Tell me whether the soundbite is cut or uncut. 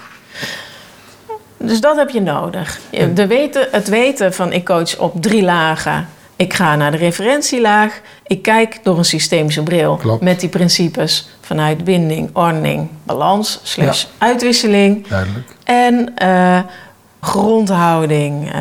cut